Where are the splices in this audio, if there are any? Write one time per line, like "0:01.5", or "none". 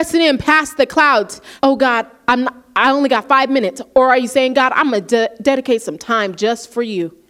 0:01.6